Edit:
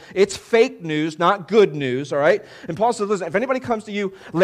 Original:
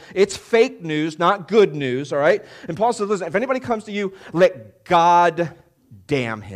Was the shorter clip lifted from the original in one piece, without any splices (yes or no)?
yes